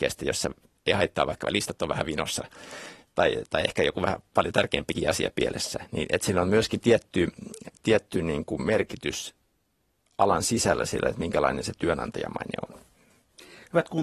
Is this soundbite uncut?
yes; 0 cuts

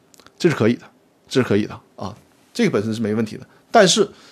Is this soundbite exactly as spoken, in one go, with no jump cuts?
yes; 0 cuts

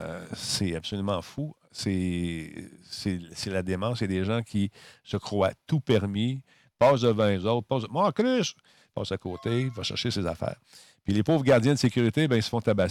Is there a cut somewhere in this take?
no; 0 cuts

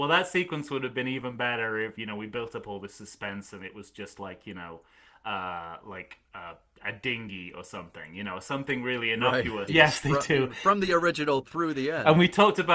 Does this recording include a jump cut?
yes; 1 cut; at 9.7 s

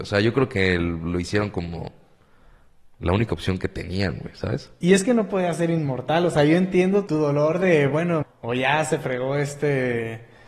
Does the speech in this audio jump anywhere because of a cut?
yes; 2 cuts; at 7.1 s, 8.2 s

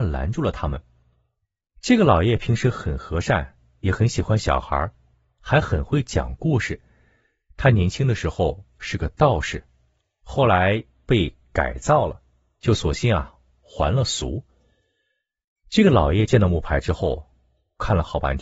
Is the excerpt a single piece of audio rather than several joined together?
yes; 0 cuts

